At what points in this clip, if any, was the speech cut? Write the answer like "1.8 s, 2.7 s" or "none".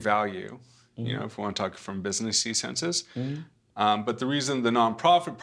none

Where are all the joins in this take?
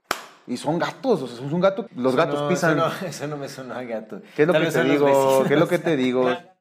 1.9 s

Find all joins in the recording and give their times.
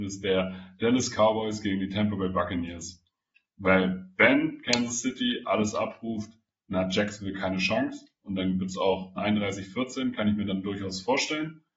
9.2 s

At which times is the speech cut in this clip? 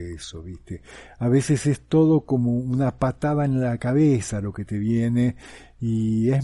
1.1 s

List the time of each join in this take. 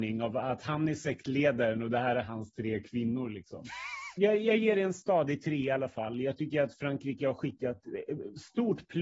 4.2 s

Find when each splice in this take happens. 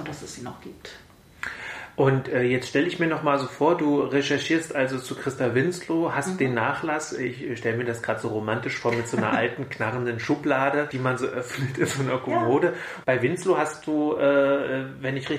13.0 s

